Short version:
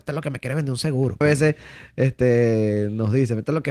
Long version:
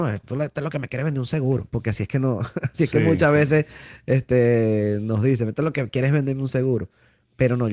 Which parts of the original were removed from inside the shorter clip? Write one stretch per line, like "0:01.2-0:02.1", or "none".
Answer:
0:01.7-0:03.3